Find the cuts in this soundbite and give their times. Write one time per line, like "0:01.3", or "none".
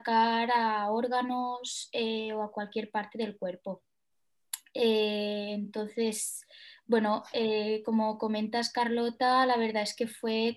none